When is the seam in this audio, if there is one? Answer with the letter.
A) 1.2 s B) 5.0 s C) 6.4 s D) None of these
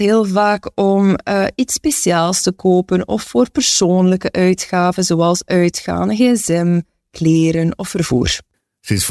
D